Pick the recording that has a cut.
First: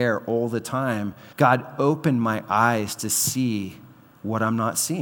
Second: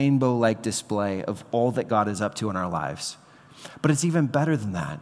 first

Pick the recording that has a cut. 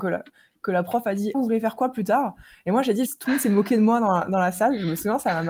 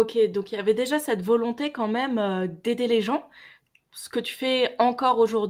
first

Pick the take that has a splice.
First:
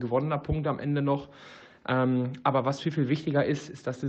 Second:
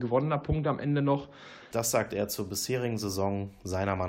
second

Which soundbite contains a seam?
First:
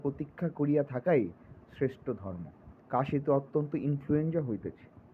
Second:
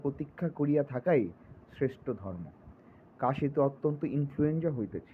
first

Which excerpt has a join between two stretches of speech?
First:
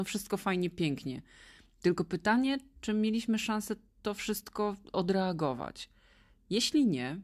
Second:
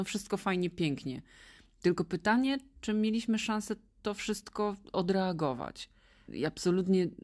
second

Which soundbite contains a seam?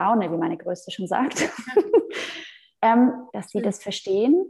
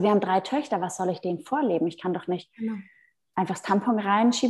first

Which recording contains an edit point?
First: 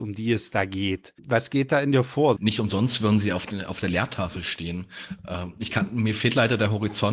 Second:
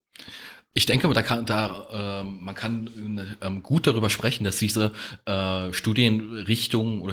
first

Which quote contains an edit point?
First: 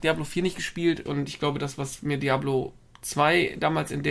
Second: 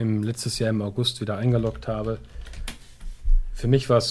first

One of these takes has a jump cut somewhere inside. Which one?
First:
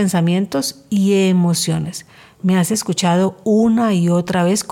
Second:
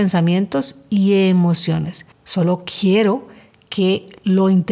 second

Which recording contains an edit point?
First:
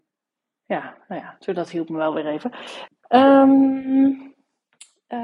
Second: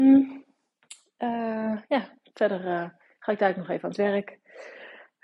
first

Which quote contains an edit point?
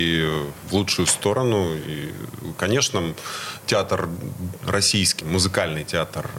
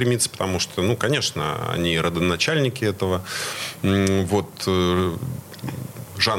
first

